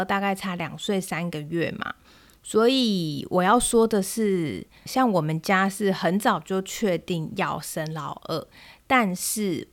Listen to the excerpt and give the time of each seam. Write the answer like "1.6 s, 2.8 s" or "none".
4.9 s